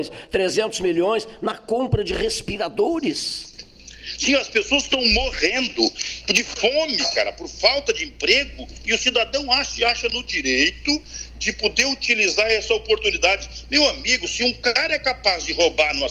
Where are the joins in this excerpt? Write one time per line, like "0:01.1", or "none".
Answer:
none

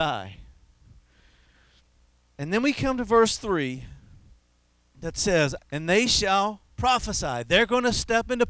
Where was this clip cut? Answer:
0:05.6

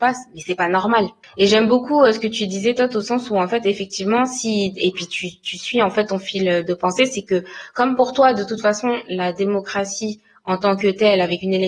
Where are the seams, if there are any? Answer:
0:01.2

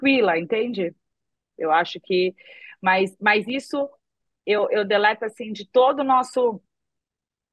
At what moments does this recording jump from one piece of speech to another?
0:01.5

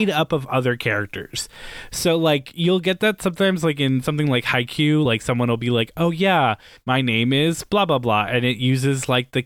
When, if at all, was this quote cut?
none

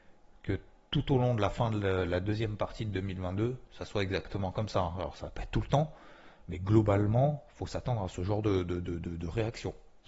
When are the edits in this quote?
none

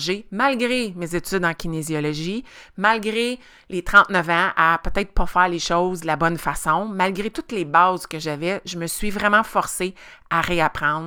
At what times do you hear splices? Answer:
none

